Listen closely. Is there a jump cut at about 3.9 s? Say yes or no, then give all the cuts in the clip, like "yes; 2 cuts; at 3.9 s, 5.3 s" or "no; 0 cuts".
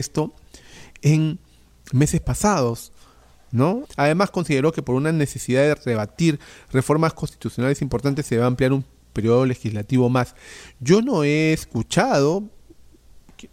yes; 1 cut; at 3.9 s